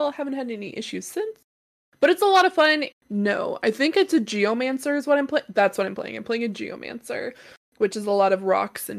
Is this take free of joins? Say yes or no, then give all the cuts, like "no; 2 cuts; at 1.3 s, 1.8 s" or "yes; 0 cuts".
no; 1 cut; at 2.9 s